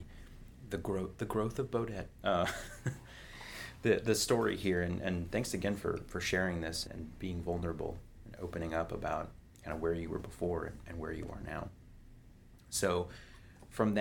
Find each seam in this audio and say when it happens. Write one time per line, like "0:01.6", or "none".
0:06.8